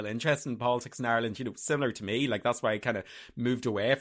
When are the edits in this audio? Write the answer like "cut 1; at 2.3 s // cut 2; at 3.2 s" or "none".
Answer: none

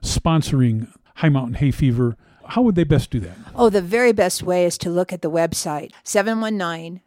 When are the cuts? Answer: cut 1; at 5.9 s

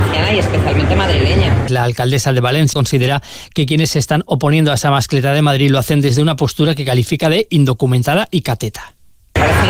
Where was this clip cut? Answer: cut 1; at 1.7 s // cut 2; at 2.7 s

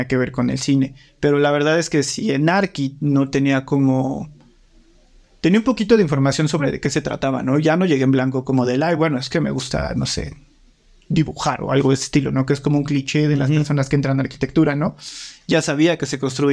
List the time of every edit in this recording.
none

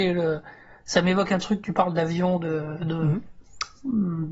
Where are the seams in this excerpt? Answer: none

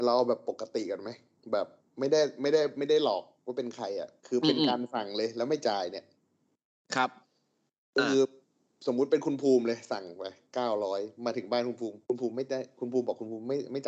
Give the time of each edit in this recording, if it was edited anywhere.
cut 1; at 4.2 s // cut 2; at 12.0 s

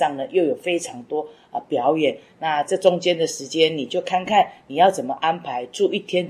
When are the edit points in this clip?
none

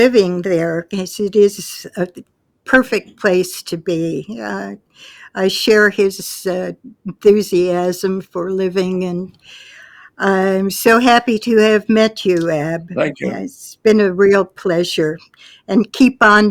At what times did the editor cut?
none

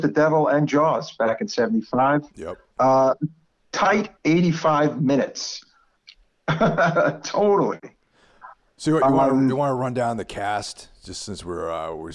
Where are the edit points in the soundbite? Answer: cut 1; at 5.9 s

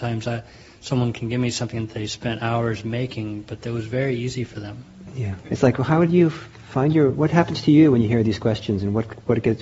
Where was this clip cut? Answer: cut 1; at 5.4 s

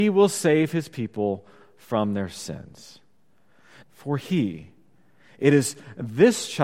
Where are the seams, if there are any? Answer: cut 1; at 3.8 s

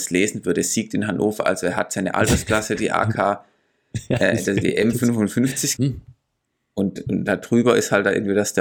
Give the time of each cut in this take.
cut 1; at 5.8 s

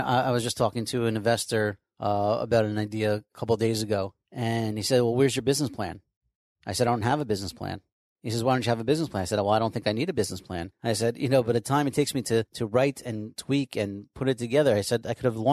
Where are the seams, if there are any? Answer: none

